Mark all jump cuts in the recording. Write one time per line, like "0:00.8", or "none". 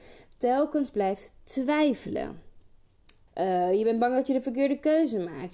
0:03.3